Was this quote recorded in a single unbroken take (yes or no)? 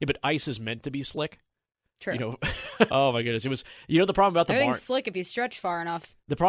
no